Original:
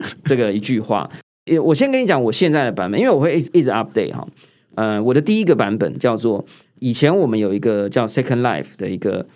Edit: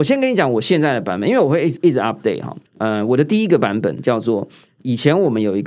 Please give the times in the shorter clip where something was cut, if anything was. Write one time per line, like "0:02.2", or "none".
0:02.7